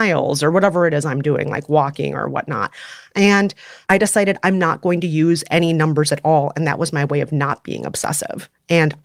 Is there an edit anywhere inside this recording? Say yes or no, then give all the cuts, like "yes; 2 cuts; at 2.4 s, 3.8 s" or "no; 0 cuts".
no; 0 cuts